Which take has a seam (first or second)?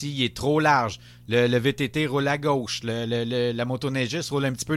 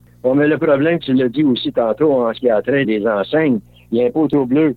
second